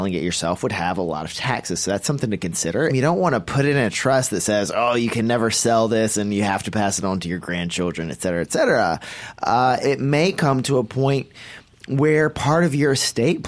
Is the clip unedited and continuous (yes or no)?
no